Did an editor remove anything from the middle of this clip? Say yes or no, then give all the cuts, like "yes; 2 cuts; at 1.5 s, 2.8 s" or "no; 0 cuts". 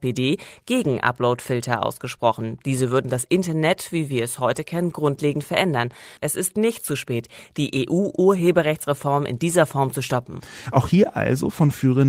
yes; 1 cut; at 6.2 s